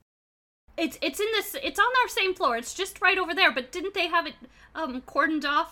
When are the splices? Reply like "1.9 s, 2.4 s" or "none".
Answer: none